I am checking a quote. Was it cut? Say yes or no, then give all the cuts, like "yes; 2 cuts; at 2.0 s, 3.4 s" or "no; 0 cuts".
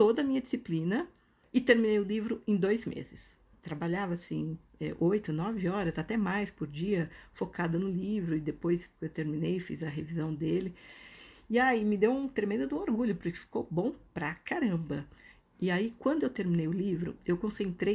no; 0 cuts